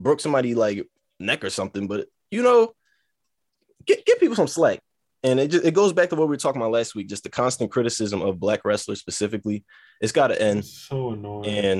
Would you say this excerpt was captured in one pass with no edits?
yes; 0 cuts

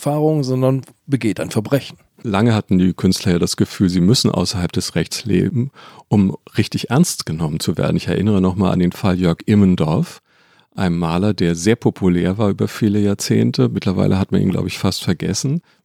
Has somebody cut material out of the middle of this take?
no; 0 cuts

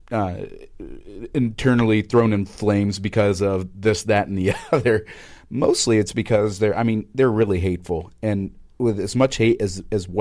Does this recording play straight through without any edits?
yes; 0 cuts

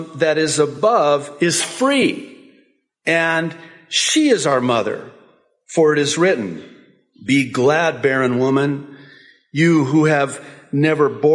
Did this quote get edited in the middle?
no; 0 cuts

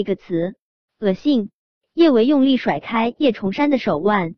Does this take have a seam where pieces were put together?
no; 0 cuts

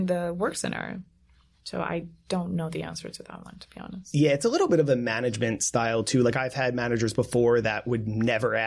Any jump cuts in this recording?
no; 0 cuts

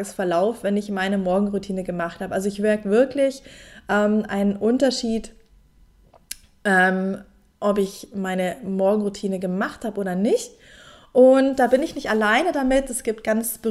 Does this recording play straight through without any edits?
yes; 0 cuts

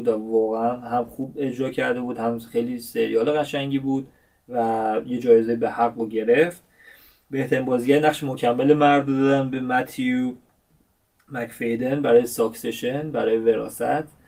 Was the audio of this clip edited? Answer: no; 0 cuts

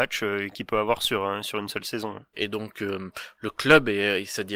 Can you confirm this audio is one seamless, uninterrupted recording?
no; 1 cut; at 2.3 s

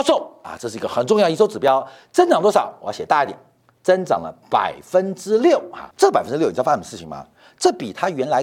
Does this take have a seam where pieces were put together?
yes; 1 cut; at 5.9 s

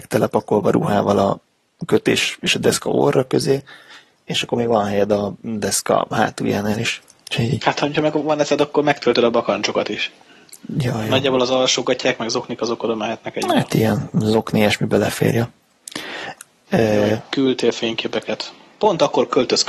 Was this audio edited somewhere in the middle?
yes; 1 cut; at 16.7 s

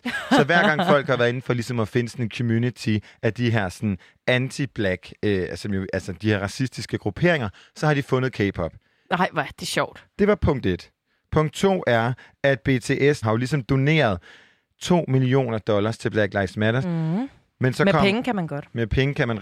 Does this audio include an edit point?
yes; 2 cuts; at 13.2 s, 16.8 s

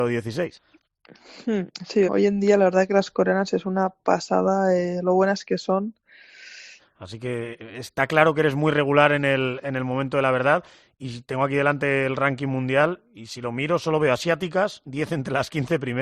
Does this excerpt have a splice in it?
yes; 2 cuts; at 2.1 s, 6.8 s

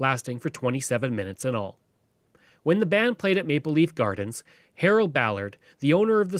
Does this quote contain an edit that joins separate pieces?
no; 0 cuts

